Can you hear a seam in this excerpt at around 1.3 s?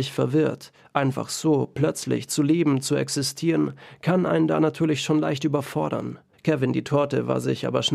no; 1 cut; at 6.3 s

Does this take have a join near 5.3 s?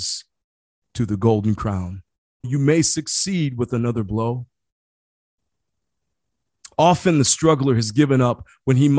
no; 2 cuts; at 2.4 s, 6.7 s

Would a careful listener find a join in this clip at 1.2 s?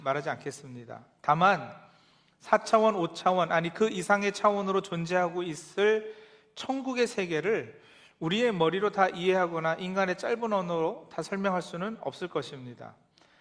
no; 0 cuts

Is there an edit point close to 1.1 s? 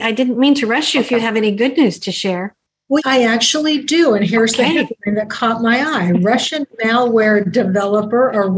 no; 1 cut; at 3.0 s

